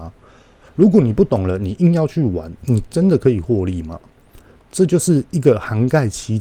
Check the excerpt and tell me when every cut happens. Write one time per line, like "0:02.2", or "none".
0:04.6